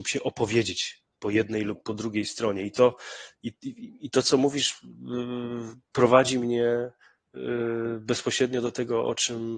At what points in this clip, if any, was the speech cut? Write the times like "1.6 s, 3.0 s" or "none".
none